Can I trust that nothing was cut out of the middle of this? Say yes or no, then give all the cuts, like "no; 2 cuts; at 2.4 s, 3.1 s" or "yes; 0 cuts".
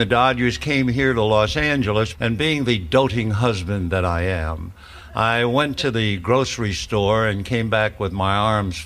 no; 1 cut; at 2.1 s